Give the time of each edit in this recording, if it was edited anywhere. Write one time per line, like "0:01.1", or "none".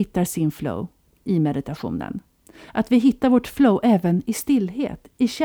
none